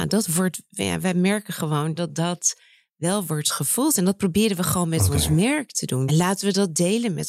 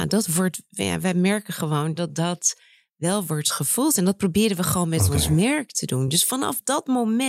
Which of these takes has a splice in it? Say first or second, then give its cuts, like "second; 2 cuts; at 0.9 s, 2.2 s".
first; 1 cut; at 6.1 s